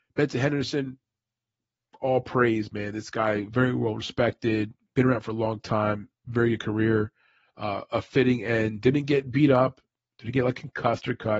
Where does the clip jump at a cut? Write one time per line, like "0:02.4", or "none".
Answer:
none